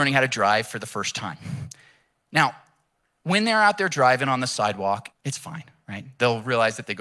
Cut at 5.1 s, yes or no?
yes